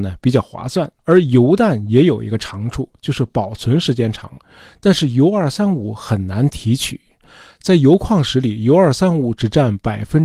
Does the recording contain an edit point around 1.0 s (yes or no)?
yes